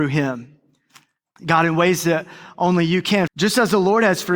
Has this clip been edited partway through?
yes; 2 cuts; at 1.4 s, 3.3 s

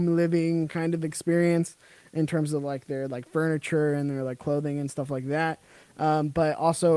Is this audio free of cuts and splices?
yes; 0 cuts

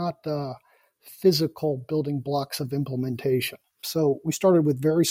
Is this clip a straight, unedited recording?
no; 1 cut; at 3.8 s

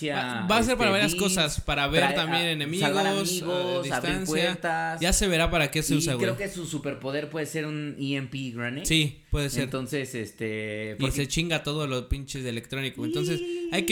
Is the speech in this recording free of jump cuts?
yes; 0 cuts

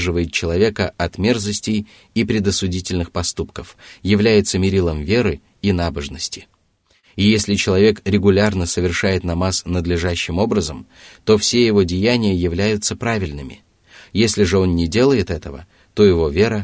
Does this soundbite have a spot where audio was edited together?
no; 0 cuts

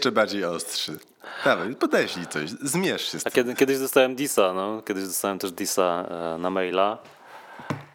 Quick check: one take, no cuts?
yes; 0 cuts

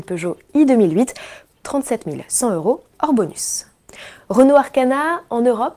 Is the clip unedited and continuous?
no; 1 cut; at 1.5 s

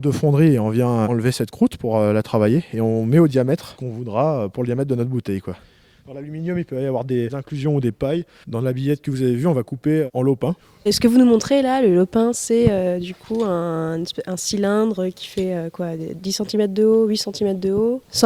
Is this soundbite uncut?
no; 1 cut; at 8.4 s

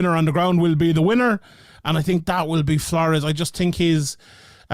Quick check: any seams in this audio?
no; 0 cuts

